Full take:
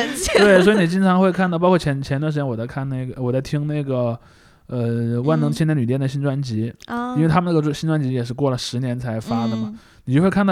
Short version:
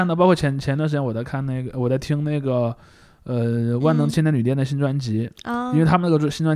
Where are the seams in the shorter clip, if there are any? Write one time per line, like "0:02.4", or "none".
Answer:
none